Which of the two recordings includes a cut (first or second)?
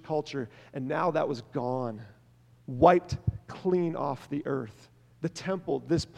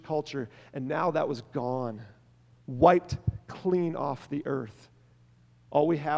first